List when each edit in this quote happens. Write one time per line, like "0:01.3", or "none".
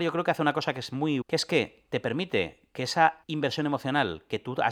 0:01.2
0:03.2